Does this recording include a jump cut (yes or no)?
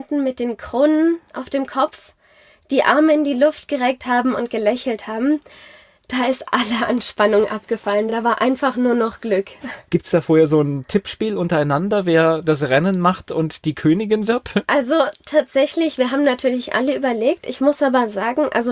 no